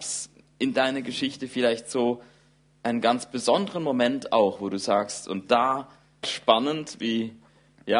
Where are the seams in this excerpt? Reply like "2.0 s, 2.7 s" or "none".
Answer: 6.2 s